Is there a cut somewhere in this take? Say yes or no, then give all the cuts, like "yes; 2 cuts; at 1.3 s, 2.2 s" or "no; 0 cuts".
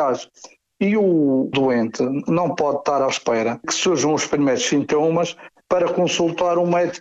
no; 0 cuts